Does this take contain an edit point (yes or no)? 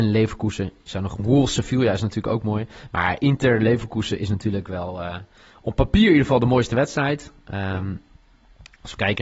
no